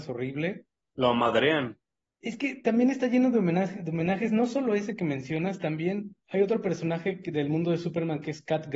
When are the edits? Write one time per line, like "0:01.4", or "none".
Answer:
0:02.2
0:06.2